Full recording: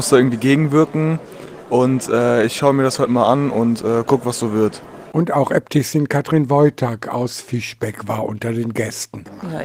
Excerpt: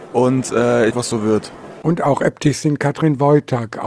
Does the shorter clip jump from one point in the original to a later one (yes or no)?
yes